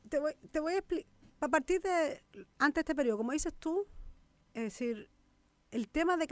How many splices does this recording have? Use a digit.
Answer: 1